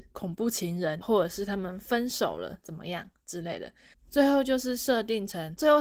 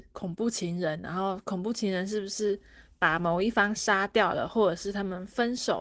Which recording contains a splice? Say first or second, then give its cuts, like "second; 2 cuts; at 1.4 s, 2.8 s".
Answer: first; 2 cuts; at 1.0 s, 3.9 s